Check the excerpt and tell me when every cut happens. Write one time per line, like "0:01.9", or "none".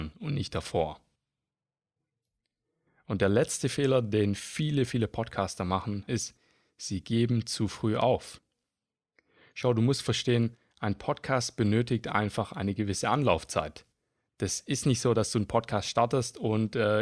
0:06.1